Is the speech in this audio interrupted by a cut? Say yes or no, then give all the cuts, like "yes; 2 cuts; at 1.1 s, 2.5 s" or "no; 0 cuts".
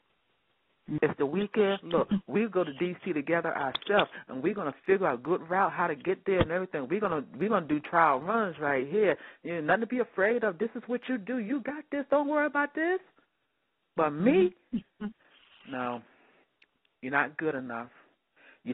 yes; 1 cut; at 1.0 s